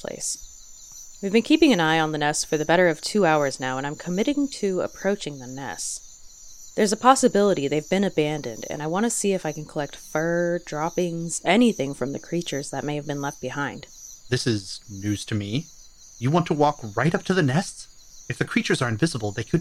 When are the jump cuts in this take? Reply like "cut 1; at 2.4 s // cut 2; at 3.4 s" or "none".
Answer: none